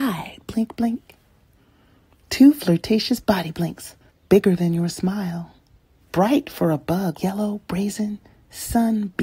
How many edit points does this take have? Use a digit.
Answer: 3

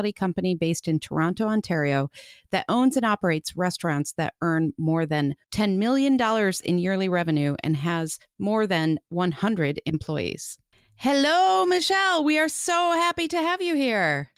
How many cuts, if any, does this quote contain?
1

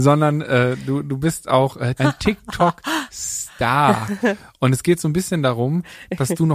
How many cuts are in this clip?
1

